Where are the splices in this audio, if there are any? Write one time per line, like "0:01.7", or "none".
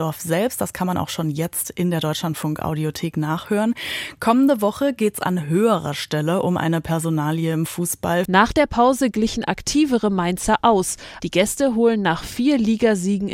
0:08.3
0:11.2